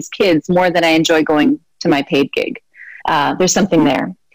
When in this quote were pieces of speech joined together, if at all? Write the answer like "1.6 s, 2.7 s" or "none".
3.0 s